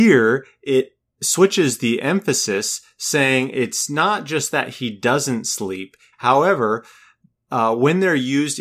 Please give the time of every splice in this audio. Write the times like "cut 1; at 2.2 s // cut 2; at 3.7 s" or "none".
cut 1; at 6.1 s